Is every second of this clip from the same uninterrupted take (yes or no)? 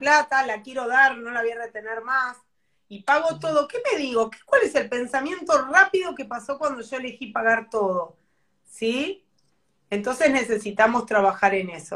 yes